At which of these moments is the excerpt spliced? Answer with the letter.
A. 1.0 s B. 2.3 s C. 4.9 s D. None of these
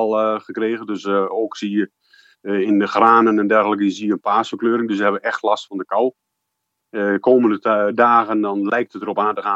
D